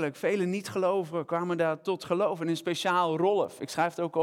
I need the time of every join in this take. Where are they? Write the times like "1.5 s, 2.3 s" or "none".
none